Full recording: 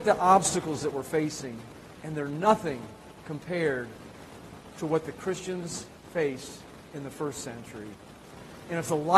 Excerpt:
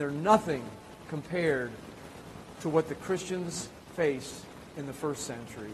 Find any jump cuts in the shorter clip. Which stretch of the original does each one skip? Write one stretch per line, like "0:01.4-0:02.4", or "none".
none

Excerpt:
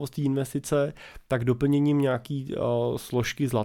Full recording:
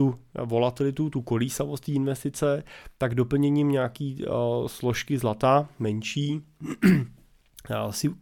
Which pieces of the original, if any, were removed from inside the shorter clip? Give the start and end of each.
none

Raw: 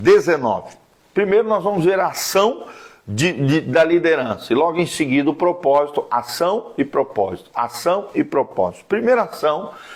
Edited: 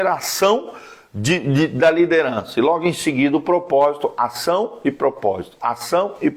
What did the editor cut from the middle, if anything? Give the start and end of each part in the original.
none

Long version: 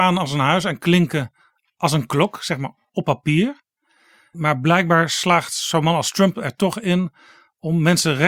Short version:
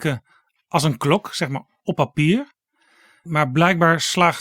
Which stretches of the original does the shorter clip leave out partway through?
none

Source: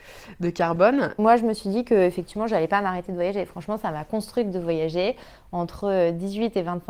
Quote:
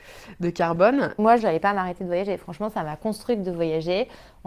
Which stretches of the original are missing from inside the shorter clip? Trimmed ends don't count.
0:01.4-0:02.5

